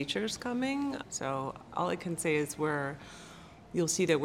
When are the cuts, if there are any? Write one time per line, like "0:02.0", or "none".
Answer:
0:01.0